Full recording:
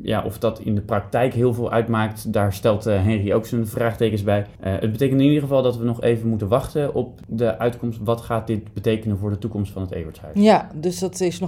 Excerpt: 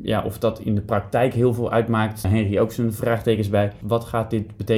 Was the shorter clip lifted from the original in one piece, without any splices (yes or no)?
no